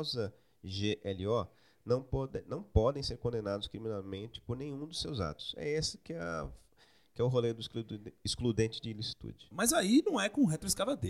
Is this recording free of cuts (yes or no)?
no